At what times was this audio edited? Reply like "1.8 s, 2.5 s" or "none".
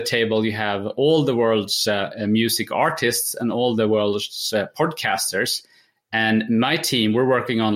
none